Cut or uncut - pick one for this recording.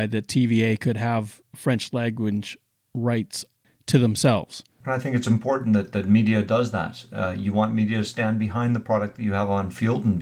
cut